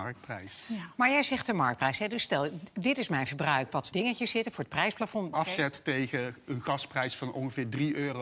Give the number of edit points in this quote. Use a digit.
2